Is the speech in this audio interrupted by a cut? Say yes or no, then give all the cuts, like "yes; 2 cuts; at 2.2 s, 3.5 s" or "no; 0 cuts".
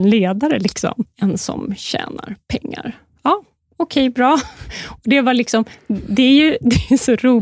yes; 1 cut; at 1.1 s